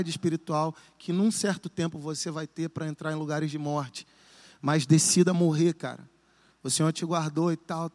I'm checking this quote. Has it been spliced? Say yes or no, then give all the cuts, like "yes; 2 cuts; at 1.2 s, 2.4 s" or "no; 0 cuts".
no; 0 cuts